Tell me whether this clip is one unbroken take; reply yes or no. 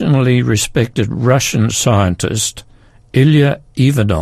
yes